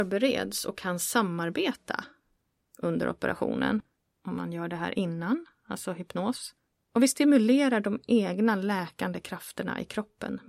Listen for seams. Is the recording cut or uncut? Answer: uncut